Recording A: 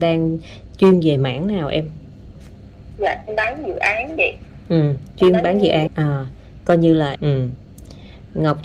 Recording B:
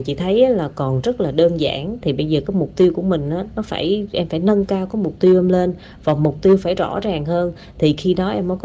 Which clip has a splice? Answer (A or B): A